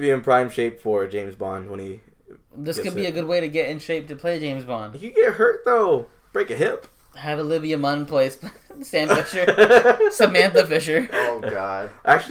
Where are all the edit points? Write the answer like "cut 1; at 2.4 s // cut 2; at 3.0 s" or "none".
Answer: none